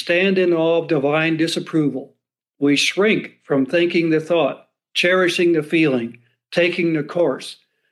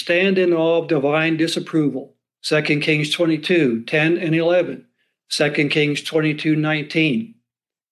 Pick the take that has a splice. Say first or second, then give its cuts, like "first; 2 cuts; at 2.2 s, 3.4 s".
second; 1 cut; at 2.3 s